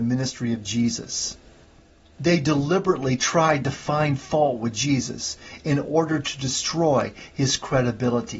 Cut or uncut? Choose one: uncut